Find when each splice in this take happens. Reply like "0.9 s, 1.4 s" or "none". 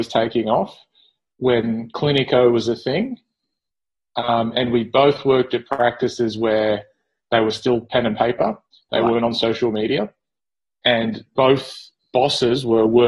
none